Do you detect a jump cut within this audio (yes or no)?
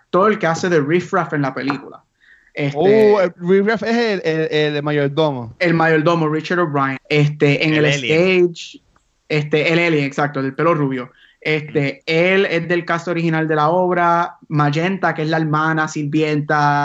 yes